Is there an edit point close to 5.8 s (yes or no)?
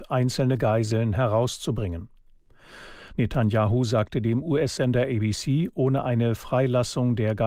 no